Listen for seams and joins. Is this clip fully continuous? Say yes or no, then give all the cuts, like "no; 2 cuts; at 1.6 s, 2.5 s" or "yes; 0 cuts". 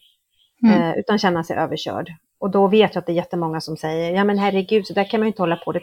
yes; 0 cuts